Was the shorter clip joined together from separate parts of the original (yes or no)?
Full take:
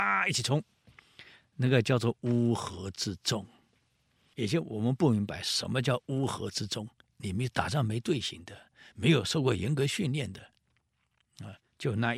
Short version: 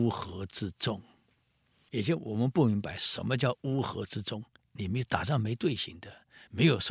no